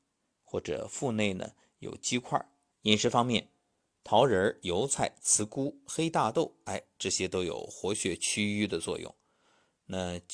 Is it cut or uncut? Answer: cut